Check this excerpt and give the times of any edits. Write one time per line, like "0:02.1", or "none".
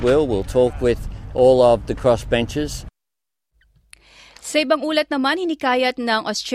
none